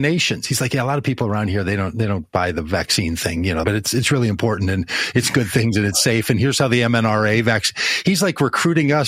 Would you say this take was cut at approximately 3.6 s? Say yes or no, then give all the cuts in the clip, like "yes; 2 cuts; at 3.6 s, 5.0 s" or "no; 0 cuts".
yes; 1 cut; at 3.6 s